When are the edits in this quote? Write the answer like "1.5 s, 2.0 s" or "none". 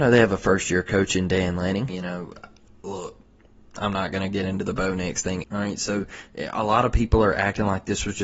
1.9 s, 5.4 s